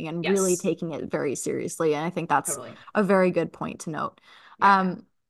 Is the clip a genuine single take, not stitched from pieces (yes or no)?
yes